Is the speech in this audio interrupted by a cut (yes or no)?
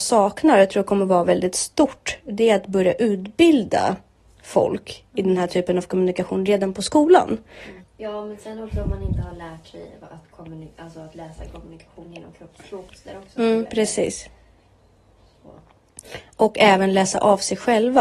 yes